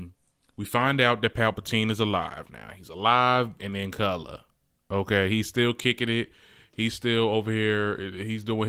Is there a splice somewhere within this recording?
yes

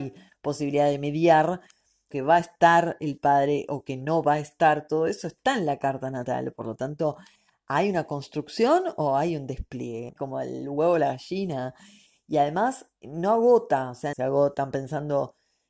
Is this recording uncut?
no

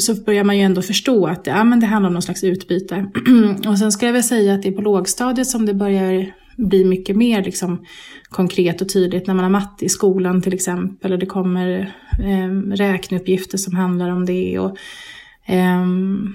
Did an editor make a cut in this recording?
no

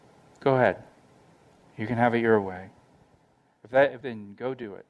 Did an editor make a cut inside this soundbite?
yes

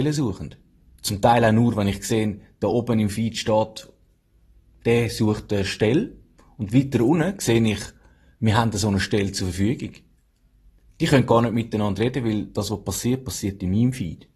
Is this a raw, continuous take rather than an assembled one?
yes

